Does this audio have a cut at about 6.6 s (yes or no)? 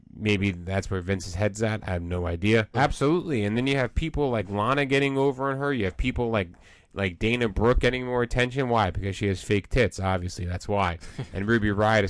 no